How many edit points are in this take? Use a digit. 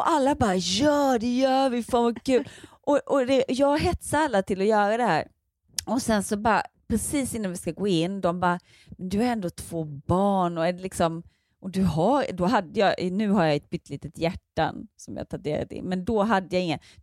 0